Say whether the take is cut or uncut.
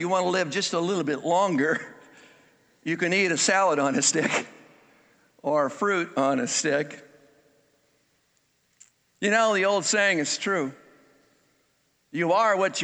uncut